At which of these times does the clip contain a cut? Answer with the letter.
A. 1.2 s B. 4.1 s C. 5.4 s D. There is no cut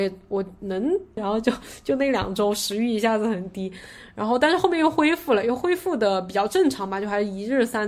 A